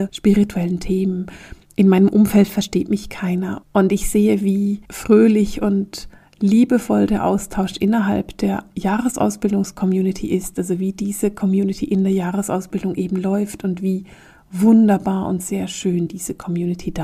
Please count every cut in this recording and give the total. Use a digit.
2